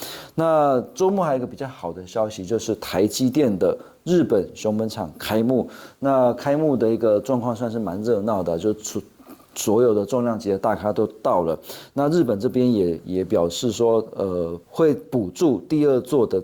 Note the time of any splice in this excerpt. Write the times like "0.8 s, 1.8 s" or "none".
14.6 s